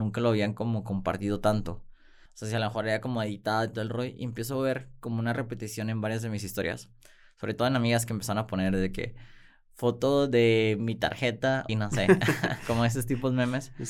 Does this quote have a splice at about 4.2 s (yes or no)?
no